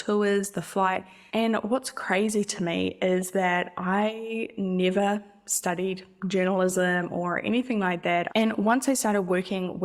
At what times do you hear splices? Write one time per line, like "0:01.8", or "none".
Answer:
0:01.3
0:08.3